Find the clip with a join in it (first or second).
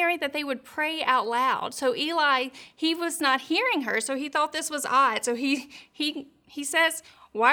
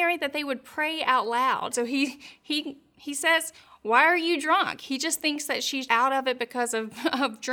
second